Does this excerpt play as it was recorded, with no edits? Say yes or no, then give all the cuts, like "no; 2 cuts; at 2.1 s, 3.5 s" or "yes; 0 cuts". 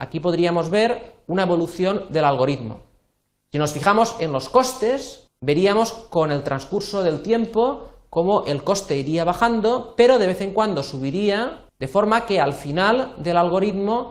no; 2 cuts; at 5.3 s, 11.7 s